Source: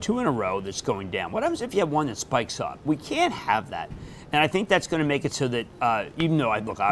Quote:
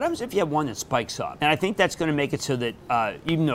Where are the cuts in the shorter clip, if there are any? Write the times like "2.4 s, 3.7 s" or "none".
1.4 s